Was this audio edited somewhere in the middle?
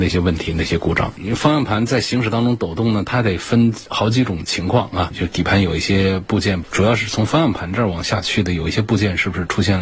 yes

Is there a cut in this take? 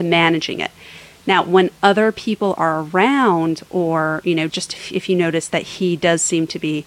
yes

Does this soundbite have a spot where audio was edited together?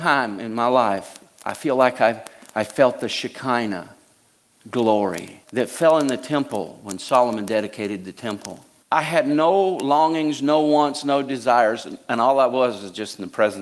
yes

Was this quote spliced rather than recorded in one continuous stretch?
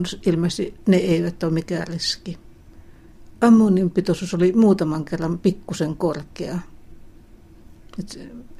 no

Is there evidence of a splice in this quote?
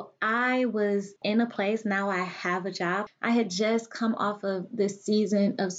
yes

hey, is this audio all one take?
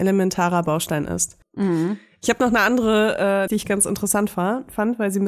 no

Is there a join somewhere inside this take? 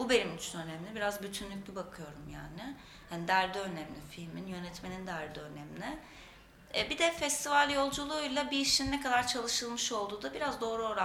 no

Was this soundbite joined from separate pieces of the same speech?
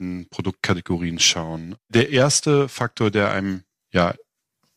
no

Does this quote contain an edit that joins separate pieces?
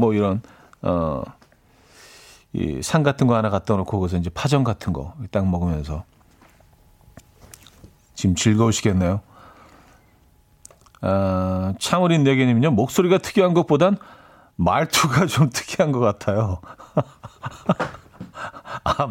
no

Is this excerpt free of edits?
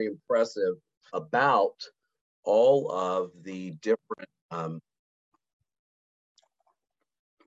no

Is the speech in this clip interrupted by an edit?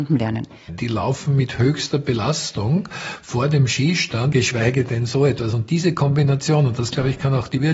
yes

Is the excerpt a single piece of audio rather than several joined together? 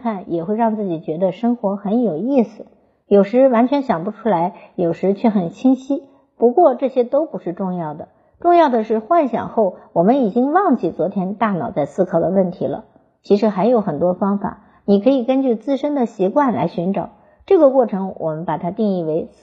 yes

